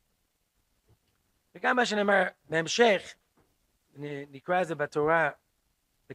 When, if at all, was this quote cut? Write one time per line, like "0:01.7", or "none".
none